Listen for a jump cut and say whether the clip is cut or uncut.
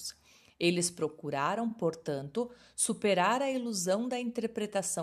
uncut